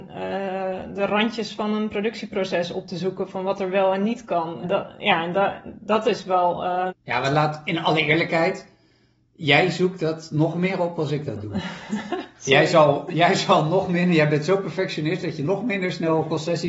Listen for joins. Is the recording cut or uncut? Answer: cut